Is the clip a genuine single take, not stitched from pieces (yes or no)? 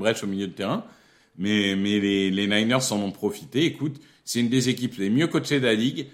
yes